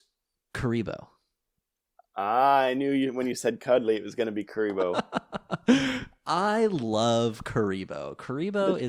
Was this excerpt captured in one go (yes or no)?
yes